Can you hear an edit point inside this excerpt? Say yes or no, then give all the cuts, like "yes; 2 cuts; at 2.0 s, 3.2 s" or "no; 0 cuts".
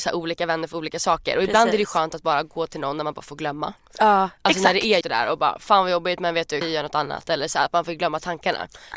yes; 2 cuts; at 5.0 s, 6.6 s